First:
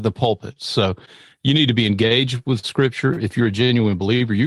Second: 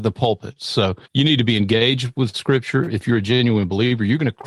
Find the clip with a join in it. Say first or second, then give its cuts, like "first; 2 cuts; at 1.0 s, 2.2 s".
second; 1 cut; at 1.0 s